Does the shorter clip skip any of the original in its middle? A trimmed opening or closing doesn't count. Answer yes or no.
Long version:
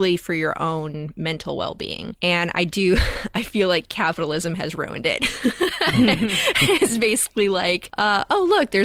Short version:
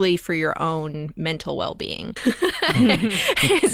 yes